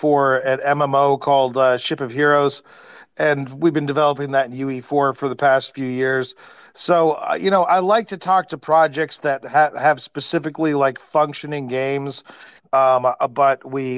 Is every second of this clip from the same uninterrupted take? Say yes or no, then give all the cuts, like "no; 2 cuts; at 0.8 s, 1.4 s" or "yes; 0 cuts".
no; 1 cut; at 12.6 s